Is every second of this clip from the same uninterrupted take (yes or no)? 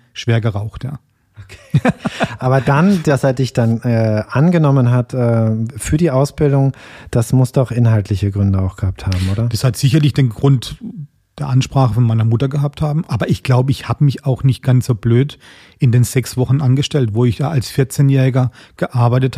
yes